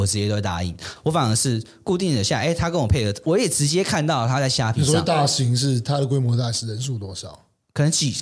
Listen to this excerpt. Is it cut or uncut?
cut